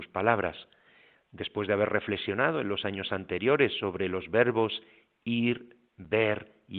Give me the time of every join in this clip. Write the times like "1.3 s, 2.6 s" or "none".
none